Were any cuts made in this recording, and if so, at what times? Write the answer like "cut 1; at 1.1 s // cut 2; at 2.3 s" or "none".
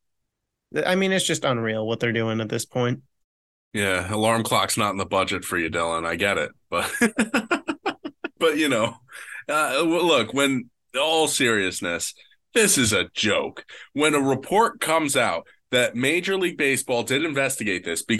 none